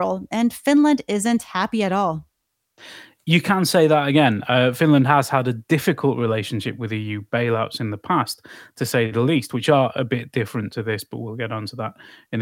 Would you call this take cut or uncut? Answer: uncut